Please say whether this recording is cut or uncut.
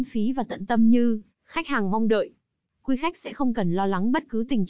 uncut